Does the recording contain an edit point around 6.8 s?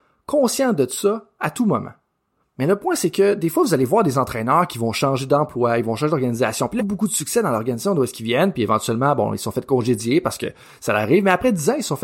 yes; 1 cut; at 6.8 s

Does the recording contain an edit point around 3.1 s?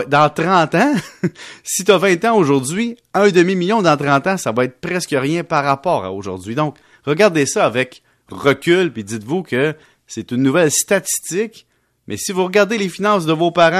no; 0 cuts

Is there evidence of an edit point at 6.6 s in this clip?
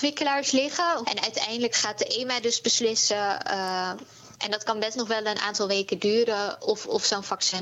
no; 1 cut; at 1.0 s

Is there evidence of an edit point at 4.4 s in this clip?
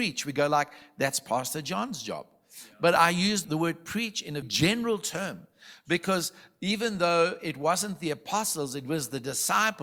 yes; 1 cut; at 4.4 s

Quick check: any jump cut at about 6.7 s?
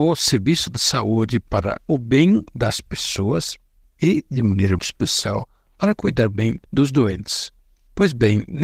yes; 2 cuts; at 4.8 s, 6.7 s

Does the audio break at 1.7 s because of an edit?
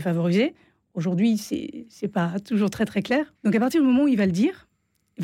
no; 1 cut; at 3.4 s

